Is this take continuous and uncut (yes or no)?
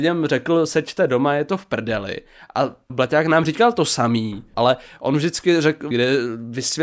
no